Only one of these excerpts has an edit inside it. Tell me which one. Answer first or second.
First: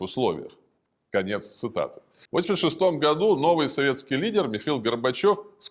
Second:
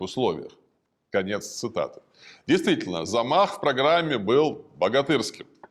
first